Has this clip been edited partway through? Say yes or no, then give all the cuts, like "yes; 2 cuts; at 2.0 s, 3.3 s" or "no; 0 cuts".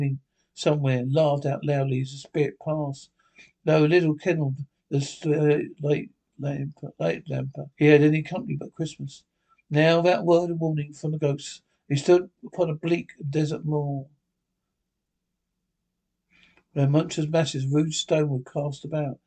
yes; 1 cut; at 7.7 s